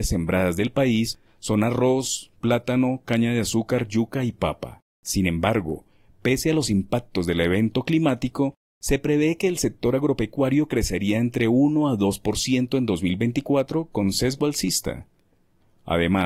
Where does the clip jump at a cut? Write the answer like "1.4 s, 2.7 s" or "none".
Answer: 4.9 s

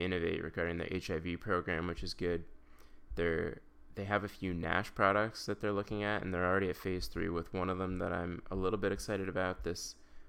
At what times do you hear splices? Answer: none

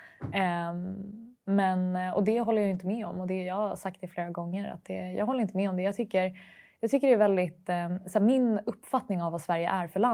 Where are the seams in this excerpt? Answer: none

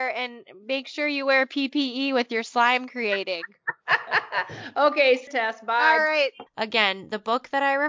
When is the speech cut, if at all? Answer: 5.3 s, 6.5 s

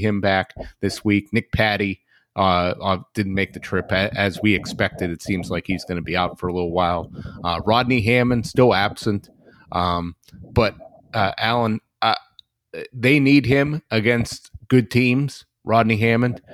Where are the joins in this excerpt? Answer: none

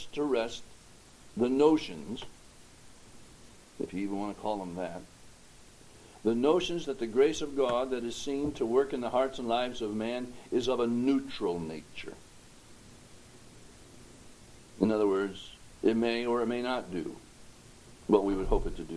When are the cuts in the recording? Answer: none

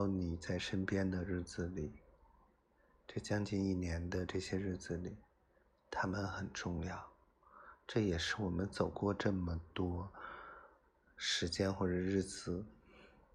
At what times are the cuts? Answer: none

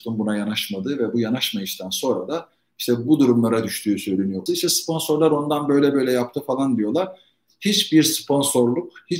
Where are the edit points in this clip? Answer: 4.5 s

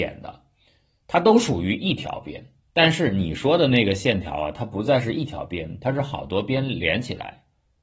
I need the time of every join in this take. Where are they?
2.7 s

